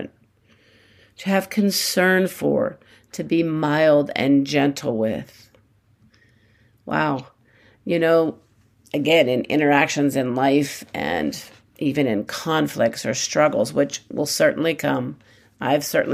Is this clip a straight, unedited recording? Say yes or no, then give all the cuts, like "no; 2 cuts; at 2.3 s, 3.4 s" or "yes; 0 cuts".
yes; 0 cuts